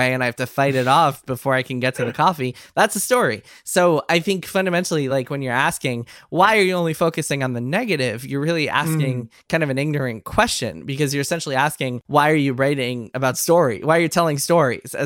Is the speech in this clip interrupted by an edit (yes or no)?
no